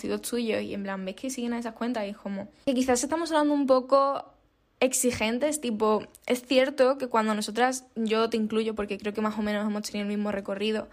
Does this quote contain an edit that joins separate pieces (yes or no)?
yes